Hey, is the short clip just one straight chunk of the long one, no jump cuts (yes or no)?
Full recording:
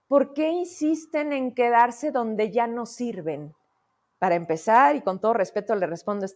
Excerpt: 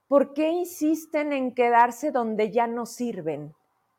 yes